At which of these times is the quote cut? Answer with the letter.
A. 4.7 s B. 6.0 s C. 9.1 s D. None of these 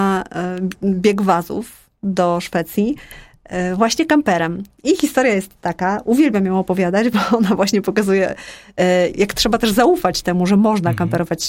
C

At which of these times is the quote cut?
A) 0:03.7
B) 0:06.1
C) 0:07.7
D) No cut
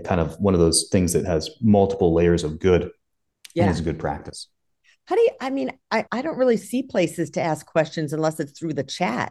B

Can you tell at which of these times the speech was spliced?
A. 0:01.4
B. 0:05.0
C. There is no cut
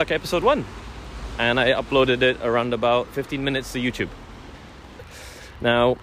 B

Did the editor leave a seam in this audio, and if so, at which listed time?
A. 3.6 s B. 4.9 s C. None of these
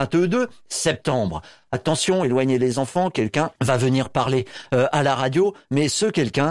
A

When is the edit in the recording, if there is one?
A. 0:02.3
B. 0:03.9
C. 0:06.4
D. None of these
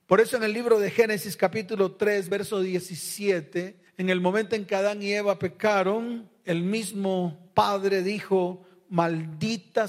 D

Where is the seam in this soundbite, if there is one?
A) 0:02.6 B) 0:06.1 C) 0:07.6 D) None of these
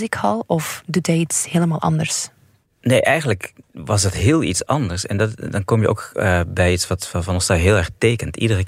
D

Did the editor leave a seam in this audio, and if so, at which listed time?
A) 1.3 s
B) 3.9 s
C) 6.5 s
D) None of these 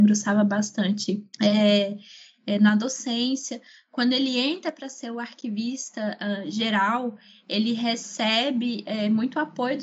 A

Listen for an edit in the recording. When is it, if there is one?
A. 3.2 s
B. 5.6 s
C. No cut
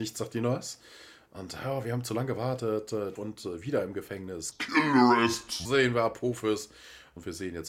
A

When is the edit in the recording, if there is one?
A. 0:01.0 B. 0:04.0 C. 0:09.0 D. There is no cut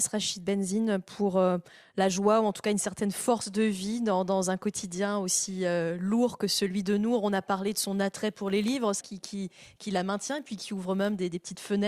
C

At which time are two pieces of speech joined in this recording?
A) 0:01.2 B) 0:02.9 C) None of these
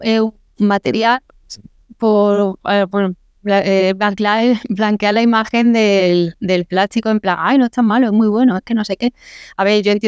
A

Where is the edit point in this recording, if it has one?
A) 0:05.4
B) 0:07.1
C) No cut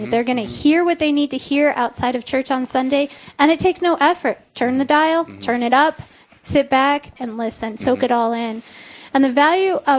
B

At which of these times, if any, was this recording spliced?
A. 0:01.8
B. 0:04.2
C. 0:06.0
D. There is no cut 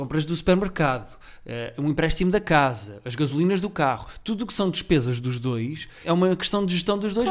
C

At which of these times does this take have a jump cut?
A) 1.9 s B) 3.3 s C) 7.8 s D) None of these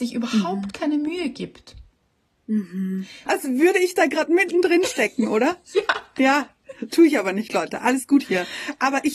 B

